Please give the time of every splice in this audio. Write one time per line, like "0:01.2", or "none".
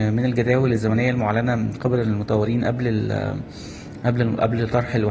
none

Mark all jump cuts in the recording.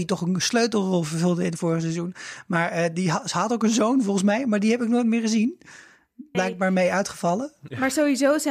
0:06.3

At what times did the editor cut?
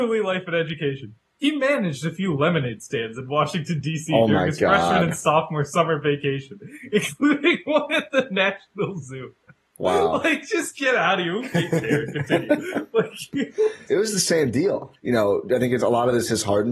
0:13.9
0:14.9

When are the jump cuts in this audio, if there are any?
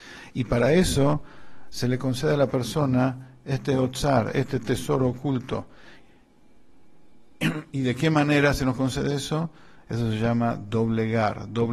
0:09.8

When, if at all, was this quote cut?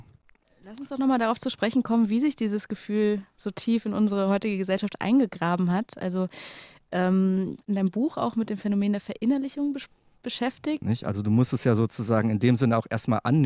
0:07.6
0:10.8

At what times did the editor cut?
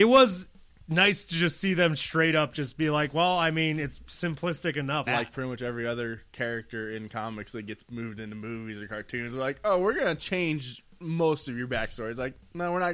0:05.1

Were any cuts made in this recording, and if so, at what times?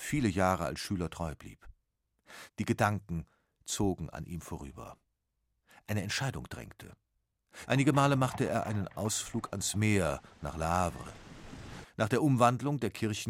0:02.5
0:07.7
0:11.8

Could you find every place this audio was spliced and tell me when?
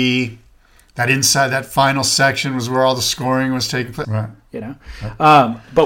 0:04.0

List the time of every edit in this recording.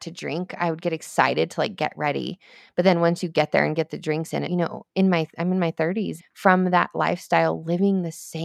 0:04.5
0:06.2

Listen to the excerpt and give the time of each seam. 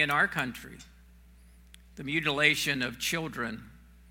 none

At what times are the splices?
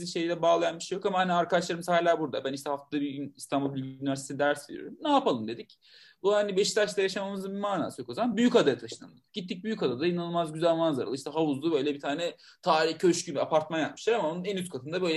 none

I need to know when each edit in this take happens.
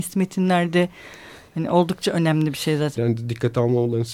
0:03.0

